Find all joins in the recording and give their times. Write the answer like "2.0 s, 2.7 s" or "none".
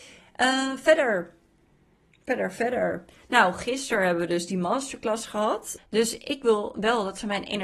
5.8 s